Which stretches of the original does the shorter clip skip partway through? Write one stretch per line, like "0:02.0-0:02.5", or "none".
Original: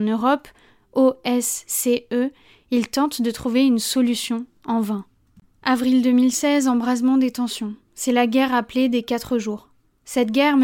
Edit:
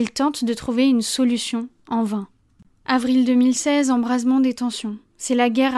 none